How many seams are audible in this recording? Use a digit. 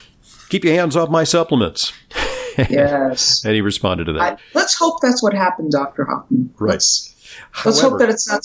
0